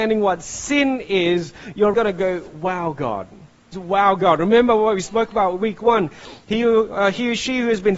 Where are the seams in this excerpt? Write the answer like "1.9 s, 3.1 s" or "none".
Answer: 1.9 s, 3.7 s